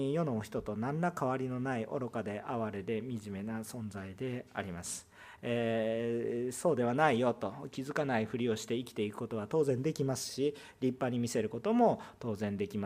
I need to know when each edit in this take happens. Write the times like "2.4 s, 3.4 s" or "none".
none